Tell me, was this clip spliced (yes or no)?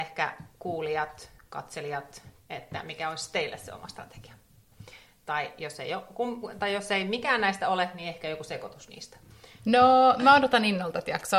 yes